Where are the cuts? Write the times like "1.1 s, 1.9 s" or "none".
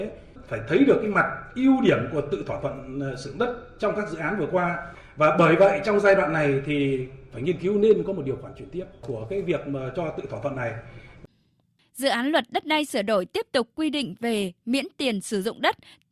none